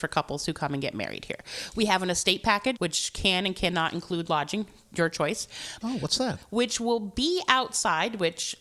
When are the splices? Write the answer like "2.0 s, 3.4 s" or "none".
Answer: 2.8 s, 5.8 s